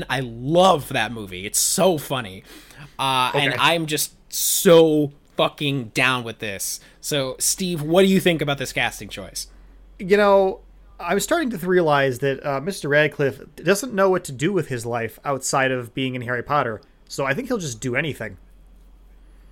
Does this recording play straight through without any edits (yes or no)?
yes